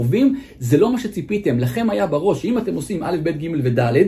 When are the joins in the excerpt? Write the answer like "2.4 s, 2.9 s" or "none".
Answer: none